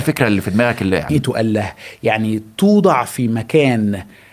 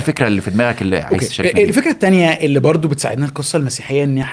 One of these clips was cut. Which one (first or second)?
first